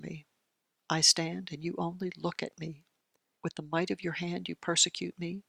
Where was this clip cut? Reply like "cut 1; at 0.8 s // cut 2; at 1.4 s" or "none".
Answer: cut 1; at 3.4 s